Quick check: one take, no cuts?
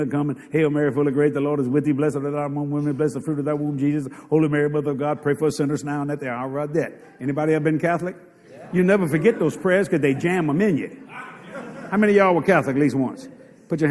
yes; 0 cuts

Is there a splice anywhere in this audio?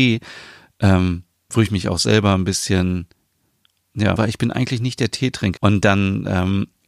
yes; 2 cuts; at 4.2 s, 5.6 s

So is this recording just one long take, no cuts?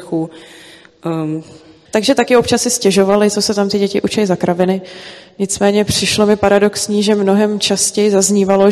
no; 1 cut; at 1.9 s

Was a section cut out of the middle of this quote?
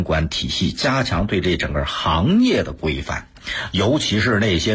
no; 0 cuts

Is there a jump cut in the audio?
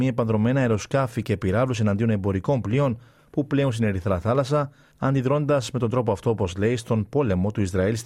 no; 0 cuts

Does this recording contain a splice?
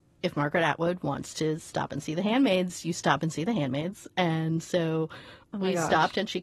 no; 0 cuts

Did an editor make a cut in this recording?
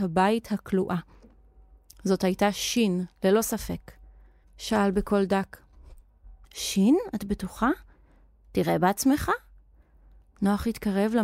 yes; 2 cuts; at 4.4 s, 6.4 s

